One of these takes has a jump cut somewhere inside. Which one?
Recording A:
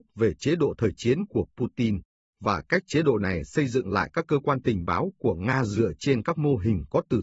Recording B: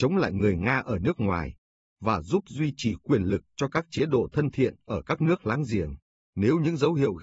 B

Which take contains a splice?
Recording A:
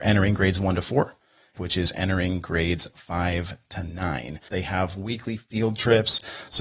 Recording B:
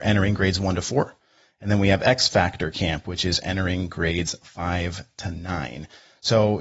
A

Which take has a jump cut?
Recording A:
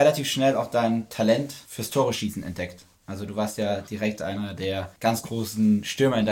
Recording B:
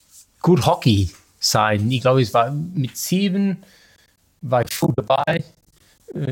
A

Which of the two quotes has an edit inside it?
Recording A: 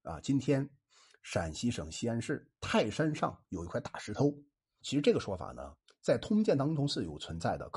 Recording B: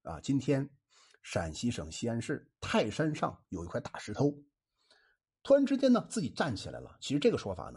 A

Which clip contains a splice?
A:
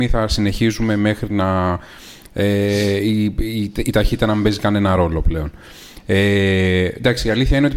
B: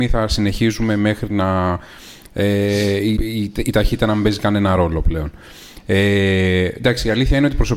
B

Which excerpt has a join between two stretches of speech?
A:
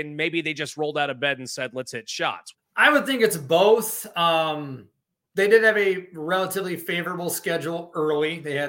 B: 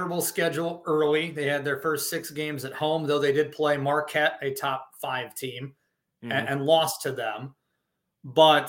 A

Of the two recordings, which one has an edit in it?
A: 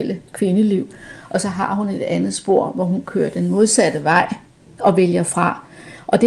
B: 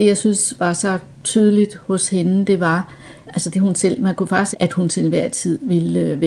B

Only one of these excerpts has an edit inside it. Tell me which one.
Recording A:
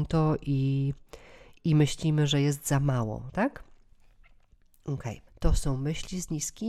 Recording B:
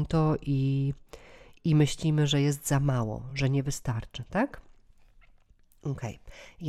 A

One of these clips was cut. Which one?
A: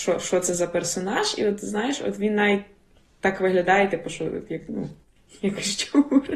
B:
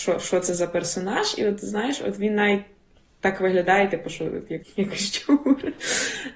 B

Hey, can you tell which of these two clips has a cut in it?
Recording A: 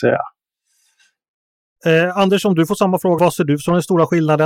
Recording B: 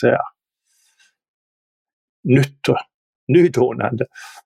A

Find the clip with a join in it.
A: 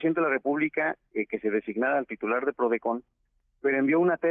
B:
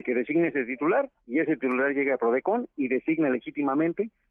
B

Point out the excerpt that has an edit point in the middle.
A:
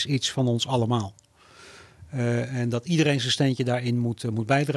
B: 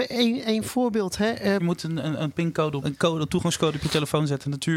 B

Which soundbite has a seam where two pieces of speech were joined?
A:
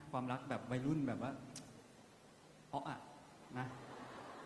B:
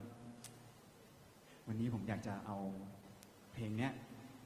A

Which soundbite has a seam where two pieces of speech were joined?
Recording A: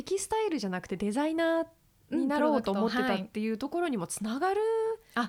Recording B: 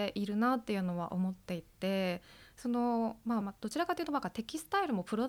B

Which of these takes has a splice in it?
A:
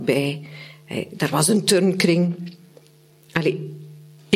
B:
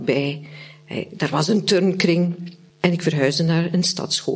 B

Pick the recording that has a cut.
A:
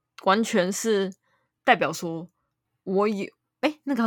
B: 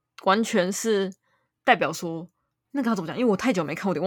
B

